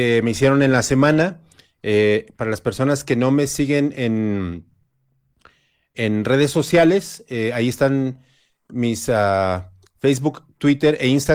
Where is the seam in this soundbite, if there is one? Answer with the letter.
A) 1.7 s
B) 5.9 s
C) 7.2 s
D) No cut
B